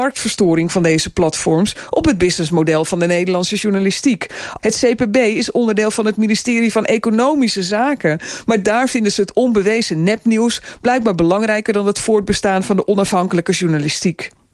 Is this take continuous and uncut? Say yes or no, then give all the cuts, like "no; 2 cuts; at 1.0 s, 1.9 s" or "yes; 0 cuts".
no; 1 cut; at 4.6 s